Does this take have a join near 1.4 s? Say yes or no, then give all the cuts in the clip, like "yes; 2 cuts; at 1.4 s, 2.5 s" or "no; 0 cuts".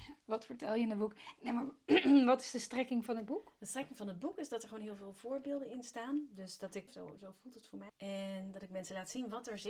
no; 2 cuts; at 6.9 s, 7.9 s